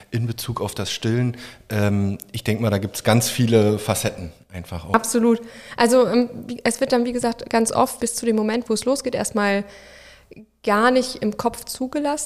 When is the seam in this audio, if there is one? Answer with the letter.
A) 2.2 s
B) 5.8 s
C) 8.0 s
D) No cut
C